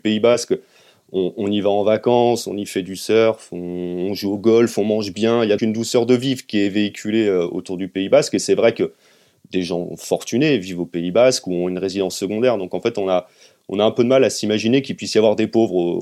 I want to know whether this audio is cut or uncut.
cut